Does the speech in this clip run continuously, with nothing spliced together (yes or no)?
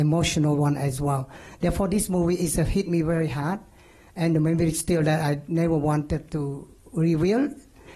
yes